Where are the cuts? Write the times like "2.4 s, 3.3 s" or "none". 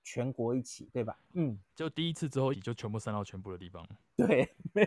1.3 s, 2.5 s